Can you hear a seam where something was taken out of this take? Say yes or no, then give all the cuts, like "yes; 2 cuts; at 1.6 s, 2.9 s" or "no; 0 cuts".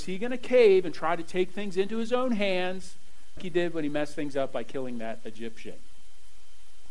yes; 1 cut; at 3.4 s